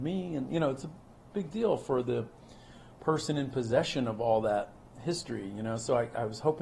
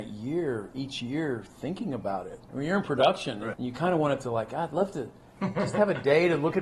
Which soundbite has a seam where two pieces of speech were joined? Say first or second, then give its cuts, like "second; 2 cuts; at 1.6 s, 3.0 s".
second; 2 cuts; at 2.5 s, 3.5 s